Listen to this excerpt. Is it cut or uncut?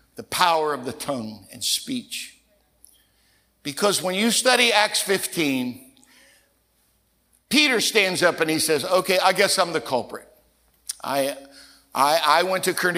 uncut